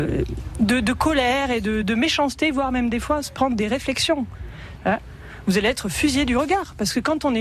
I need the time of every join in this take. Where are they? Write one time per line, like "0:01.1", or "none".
0:01.8
0:04.8